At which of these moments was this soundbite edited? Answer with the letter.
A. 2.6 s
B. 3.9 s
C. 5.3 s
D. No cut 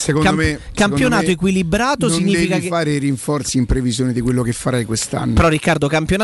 D